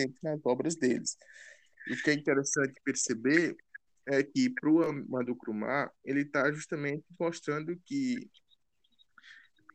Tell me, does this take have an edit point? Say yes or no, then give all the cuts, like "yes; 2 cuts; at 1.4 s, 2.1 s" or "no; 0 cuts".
no; 0 cuts